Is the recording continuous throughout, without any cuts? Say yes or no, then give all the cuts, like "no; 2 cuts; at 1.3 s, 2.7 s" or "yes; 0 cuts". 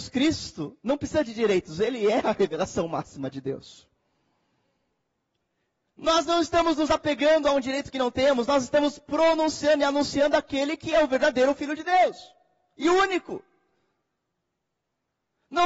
yes; 0 cuts